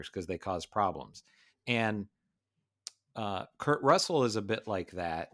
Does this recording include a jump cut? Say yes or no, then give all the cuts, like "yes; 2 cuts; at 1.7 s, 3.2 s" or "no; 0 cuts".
no; 0 cuts